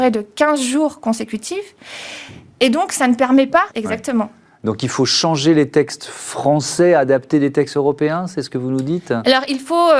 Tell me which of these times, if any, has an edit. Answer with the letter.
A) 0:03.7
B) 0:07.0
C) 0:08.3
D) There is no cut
A